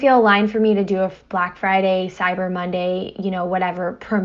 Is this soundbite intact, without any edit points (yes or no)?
yes